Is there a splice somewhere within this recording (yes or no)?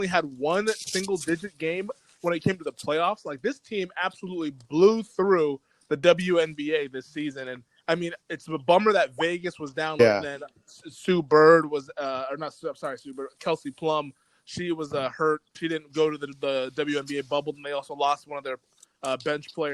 yes